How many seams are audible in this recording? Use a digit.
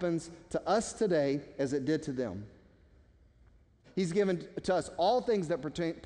1